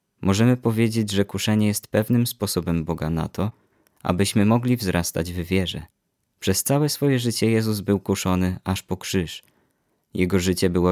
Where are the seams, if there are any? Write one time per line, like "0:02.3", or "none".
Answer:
none